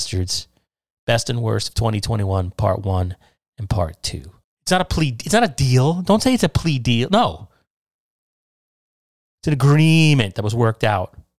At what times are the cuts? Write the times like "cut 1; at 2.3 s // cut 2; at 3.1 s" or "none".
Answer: cut 1; at 4.4 s